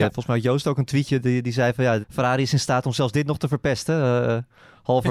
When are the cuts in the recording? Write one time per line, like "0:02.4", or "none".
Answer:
0:02.0